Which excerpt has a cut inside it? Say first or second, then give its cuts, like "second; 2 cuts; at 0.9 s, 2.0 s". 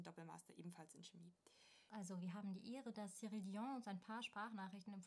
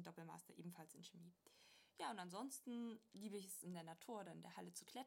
first; 1 cut; at 1.9 s